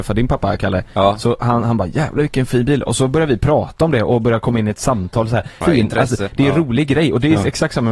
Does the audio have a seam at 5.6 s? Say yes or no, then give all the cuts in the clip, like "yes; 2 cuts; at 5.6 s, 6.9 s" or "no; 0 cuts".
yes; 1 cut; at 5.6 s